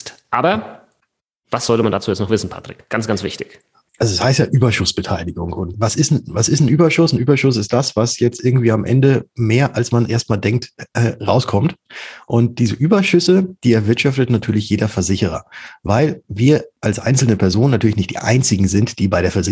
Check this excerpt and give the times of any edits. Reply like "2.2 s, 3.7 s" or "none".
5.7 s

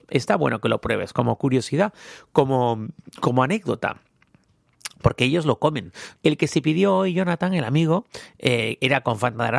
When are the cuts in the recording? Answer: 6.2 s

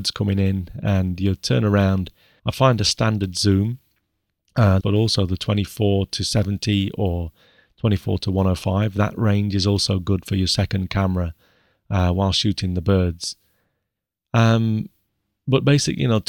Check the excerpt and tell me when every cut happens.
2.4 s, 4.8 s

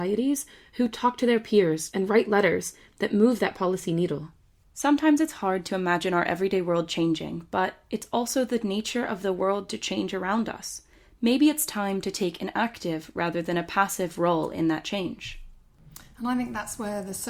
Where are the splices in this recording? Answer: 1.9 s

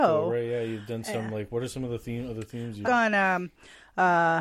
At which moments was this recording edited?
2.8 s

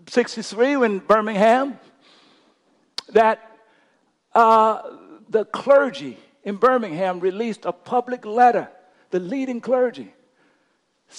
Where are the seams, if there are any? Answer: none

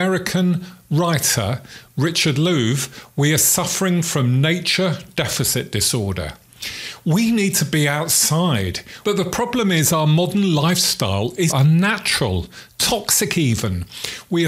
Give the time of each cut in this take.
9.0 s, 11.5 s

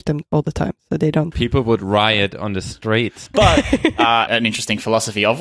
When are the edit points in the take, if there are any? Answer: 1.3 s, 3.3 s, 4.3 s

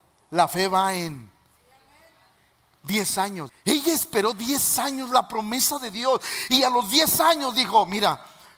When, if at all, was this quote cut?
3.5 s

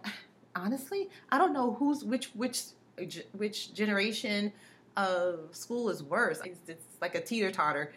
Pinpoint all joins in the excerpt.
6.4 s

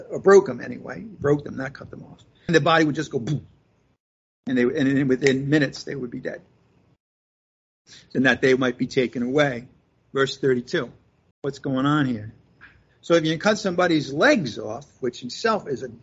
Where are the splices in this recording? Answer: 2.5 s, 11.3 s, 12.9 s

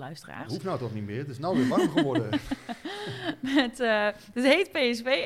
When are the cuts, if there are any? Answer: none

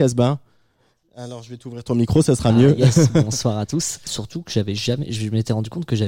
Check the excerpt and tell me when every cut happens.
4.1 s

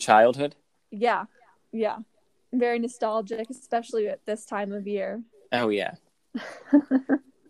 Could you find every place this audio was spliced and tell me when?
none

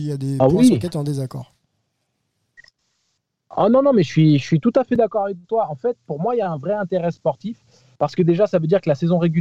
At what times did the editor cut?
none

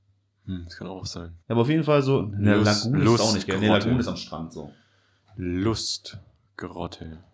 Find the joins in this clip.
1.4 s

